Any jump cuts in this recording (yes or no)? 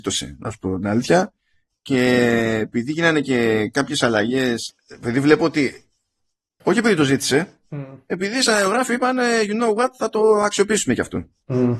yes